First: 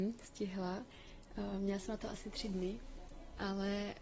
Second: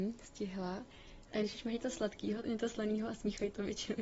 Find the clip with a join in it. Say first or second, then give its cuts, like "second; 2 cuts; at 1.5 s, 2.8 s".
second; 2 cuts; at 1.3 s, 2.4 s